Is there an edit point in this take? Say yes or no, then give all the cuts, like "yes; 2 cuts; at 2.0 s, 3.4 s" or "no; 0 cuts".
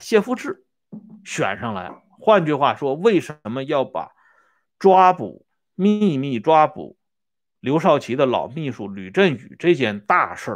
no; 0 cuts